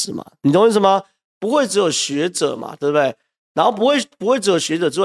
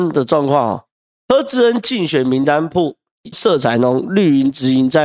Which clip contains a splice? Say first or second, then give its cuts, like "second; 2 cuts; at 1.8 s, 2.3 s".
second; 1 cut; at 3.3 s